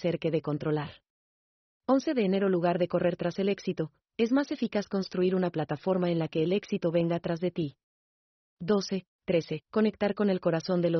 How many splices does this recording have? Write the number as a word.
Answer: one